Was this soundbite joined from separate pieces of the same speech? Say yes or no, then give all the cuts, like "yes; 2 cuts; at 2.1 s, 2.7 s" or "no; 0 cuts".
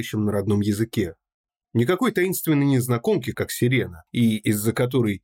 yes; 2 cuts; at 1.6 s, 3.3 s